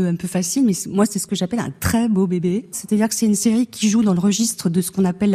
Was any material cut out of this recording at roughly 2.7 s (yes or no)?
yes